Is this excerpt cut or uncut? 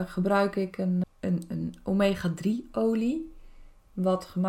cut